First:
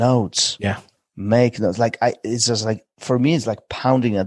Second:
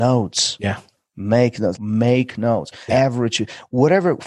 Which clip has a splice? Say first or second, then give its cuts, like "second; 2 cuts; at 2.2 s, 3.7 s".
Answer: second; 2 cuts; at 1.8 s, 2.9 s